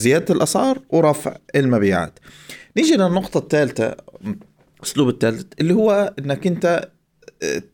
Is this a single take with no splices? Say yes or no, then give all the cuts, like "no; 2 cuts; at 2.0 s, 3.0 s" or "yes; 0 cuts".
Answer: yes; 0 cuts